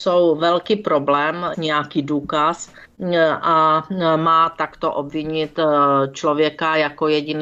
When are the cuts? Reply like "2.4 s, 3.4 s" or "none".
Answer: 1.5 s